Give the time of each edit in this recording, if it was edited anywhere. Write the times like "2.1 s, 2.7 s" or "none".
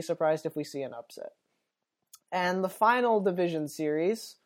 none